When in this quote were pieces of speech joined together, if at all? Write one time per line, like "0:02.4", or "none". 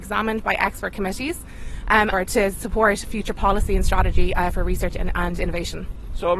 0:02.1